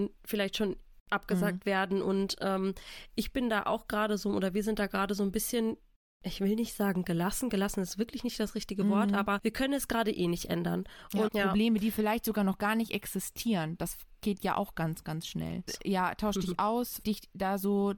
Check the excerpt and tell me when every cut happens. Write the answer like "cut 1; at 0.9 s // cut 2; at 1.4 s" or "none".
cut 1; at 11.3 s // cut 2; at 15.7 s // cut 3; at 17.0 s